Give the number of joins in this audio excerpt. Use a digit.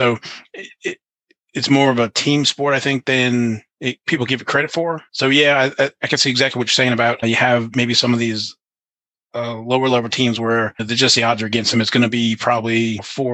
0